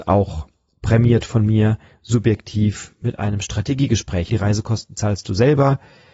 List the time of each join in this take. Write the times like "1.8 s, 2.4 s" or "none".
4.3 s